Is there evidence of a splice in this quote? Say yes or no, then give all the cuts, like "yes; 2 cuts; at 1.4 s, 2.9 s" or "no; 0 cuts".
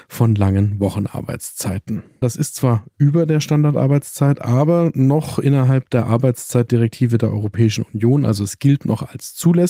yes; 1 cut; at 2.2 s